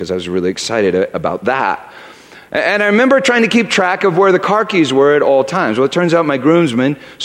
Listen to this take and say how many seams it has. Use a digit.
0